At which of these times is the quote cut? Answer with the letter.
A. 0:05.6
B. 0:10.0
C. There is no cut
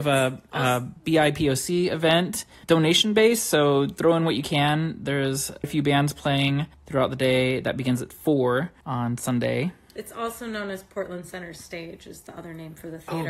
A